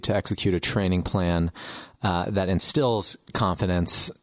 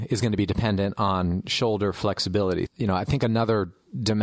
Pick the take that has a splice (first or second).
second